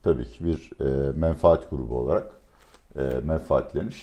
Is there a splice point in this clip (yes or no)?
no